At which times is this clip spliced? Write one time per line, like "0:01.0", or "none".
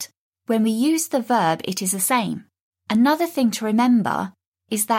0:02.7

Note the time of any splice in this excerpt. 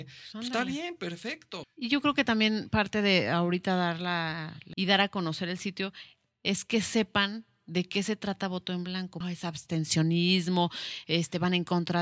0:01.6
0:04.7
0:09.2

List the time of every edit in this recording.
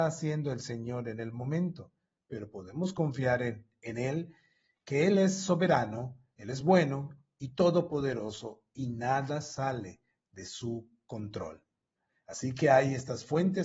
none

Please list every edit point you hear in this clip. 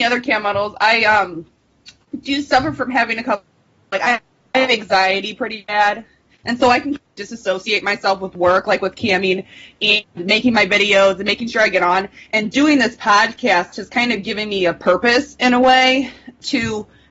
none

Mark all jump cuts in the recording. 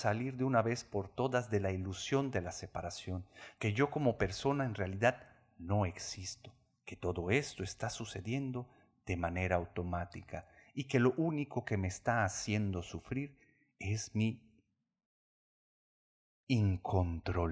0:03.6

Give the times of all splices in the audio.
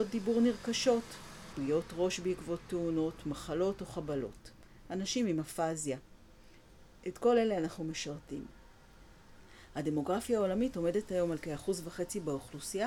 0:01.5

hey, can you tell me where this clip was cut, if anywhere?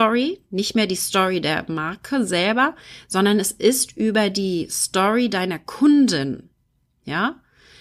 none

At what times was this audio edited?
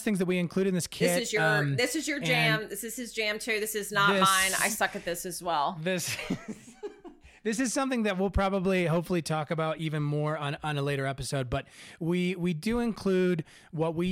none

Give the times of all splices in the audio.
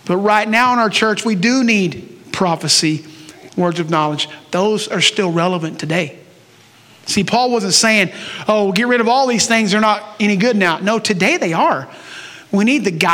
0:03.5

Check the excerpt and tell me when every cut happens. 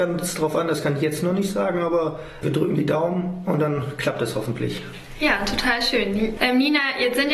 0:02.4
0:06.4

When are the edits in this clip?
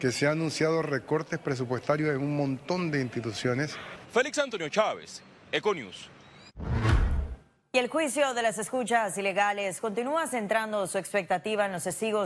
0:04.0

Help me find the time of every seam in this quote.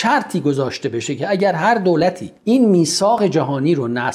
0:02.4

